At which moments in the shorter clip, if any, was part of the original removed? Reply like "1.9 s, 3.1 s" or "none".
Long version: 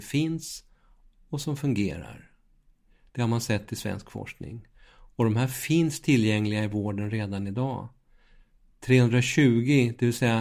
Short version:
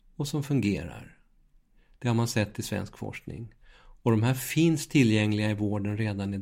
none

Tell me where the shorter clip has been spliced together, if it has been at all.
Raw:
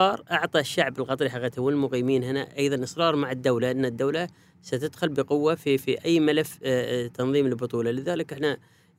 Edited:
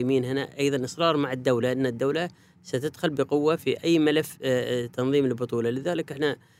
3.6 s

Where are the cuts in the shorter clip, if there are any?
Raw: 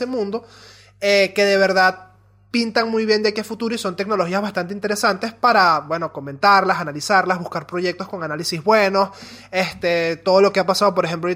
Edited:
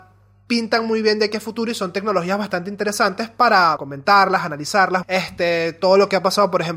3.8 s, 5.0 s

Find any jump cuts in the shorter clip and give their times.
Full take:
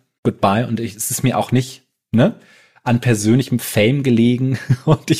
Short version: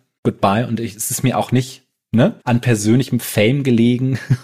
2.4 s

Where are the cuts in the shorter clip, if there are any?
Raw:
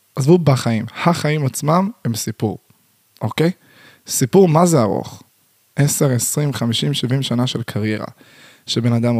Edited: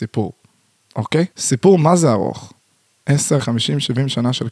1.3 s, 3.4 s

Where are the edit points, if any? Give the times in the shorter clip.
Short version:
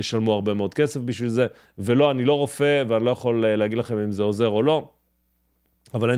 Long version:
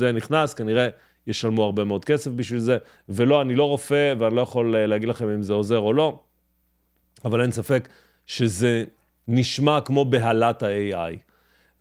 none

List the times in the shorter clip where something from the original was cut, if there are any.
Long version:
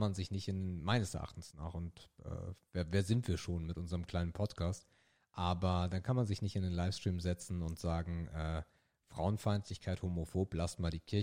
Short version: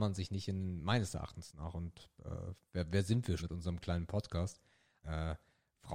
3.4 s, 5.0 s

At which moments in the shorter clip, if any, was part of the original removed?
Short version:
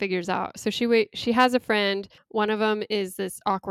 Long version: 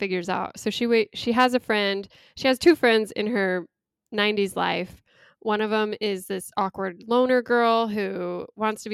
2.2 s

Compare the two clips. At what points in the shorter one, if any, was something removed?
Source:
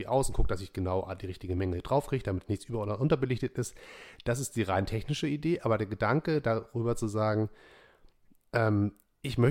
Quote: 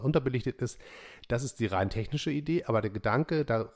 none

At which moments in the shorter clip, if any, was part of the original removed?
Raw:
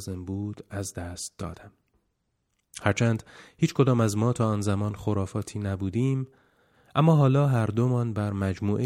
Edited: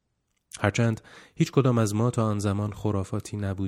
none

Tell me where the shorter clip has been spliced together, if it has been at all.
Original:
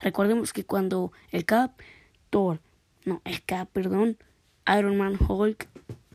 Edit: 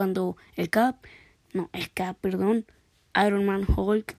1.3 s

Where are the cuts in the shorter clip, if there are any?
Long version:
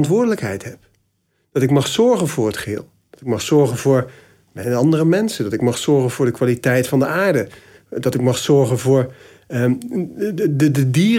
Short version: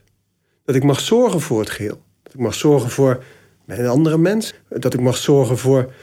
4.5 s

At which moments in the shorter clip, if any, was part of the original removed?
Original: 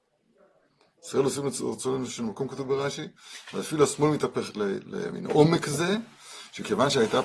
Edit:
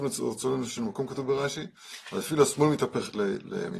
none

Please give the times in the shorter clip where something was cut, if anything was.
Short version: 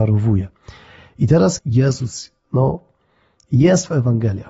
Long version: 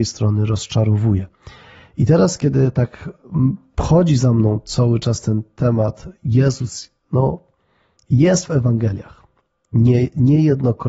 1.6 s

